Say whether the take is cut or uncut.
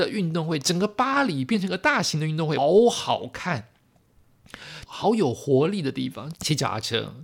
cut